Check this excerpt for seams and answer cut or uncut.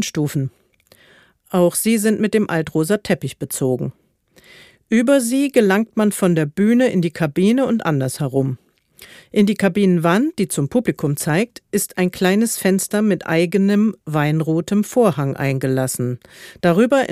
uncut